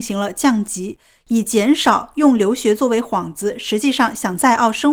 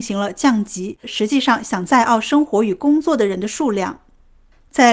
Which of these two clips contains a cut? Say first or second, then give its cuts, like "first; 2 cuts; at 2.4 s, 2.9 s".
second; 1 cut; at 1.0 s